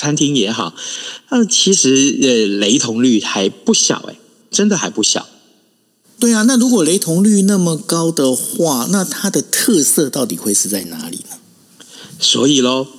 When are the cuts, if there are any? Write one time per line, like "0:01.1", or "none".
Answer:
none